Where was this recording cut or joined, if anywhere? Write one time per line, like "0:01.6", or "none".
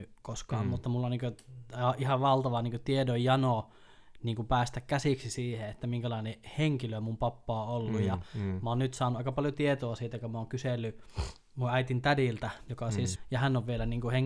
0:13.2